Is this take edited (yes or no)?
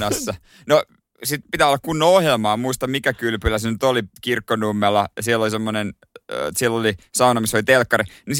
yes